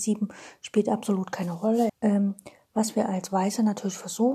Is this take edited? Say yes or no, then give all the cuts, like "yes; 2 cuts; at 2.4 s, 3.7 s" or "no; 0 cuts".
yes; 1 cut; at 1.9 s